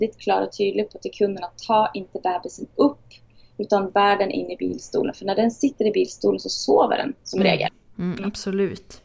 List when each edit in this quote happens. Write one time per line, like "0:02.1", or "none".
none